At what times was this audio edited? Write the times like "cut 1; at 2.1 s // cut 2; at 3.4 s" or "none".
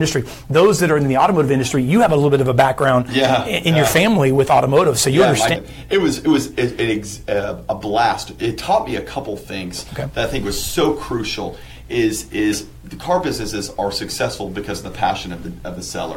cut 1; at 5.6 s